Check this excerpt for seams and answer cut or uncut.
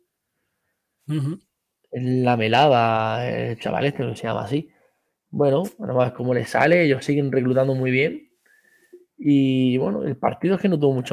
uncut